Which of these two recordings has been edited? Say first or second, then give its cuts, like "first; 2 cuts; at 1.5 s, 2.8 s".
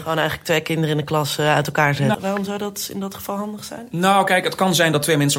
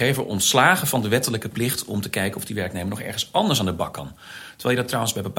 first; 1 cut; at 2.1 s